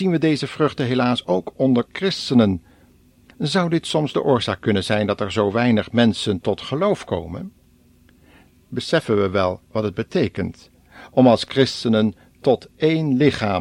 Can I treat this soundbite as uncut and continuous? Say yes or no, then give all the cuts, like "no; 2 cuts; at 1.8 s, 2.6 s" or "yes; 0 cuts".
yes; 0 cuts